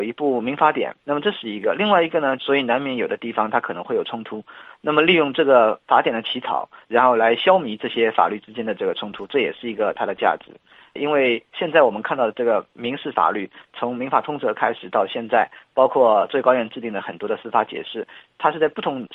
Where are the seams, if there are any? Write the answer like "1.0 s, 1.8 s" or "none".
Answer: 1.0 s, 2.4 s